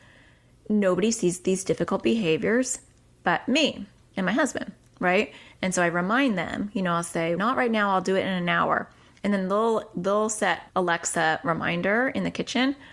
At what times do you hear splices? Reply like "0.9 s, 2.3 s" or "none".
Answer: 5.5 s, 7.4 s, 10.7 s